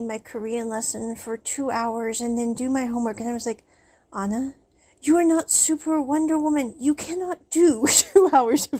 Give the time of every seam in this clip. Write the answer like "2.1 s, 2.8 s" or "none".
none